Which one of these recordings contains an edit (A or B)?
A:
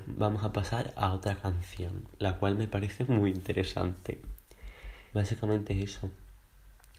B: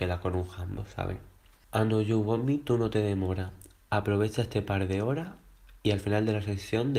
A